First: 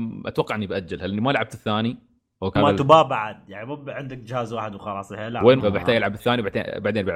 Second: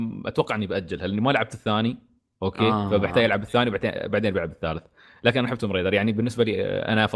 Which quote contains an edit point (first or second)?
first